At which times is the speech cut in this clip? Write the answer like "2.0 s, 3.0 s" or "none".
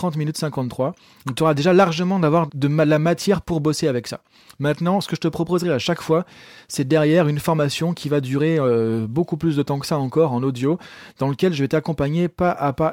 2.5 s